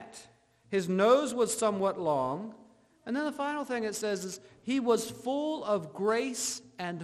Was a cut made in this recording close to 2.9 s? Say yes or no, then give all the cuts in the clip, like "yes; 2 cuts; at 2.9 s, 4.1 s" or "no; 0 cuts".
no; 0 cuts